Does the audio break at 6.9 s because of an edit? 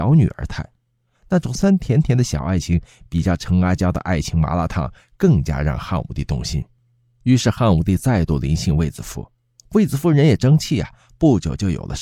no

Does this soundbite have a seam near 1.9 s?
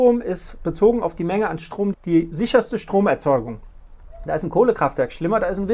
yes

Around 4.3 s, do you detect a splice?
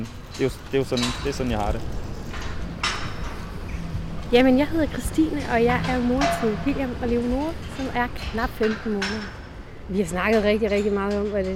no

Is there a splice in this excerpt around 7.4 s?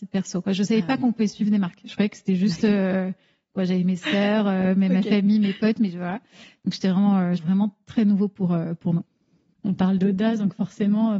yes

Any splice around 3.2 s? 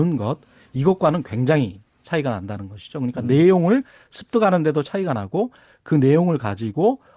no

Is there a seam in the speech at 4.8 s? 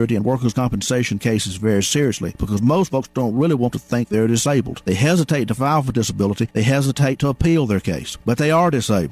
no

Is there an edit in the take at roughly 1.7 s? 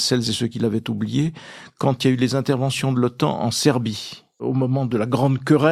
no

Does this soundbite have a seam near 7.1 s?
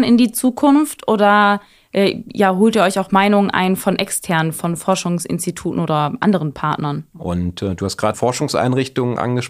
yes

